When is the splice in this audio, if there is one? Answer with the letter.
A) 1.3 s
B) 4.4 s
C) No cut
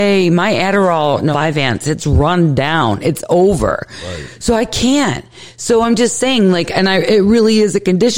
A